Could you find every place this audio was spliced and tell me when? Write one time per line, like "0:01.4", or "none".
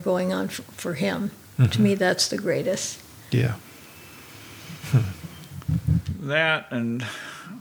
none